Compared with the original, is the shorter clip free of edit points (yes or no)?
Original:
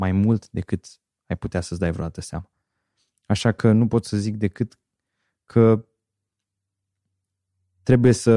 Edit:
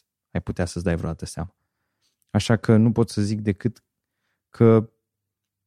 yes